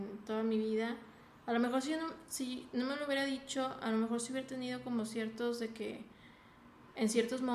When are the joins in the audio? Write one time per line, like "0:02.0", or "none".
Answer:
none

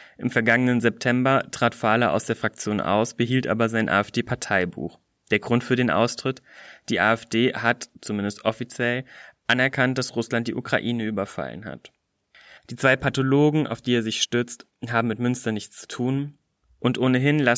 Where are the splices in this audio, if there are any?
0:12.6

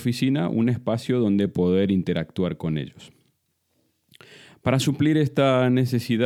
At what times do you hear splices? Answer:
none

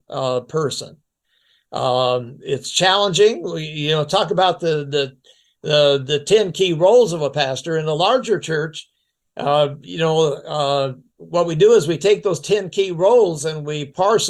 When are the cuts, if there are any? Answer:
none

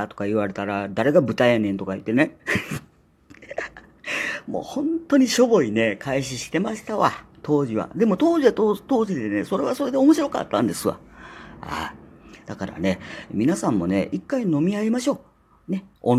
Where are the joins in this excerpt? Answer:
none

